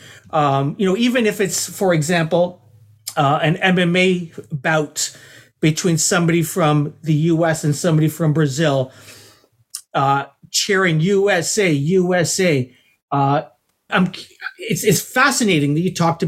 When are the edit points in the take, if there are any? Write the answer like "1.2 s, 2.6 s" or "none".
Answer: 13.9 s